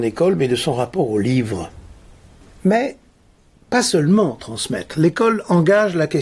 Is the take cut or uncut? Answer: uncut